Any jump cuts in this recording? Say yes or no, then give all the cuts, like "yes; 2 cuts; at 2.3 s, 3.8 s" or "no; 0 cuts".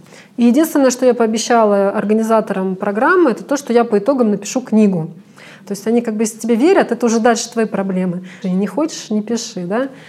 yes; 2 cuts; at 5.6 s, 8.4 s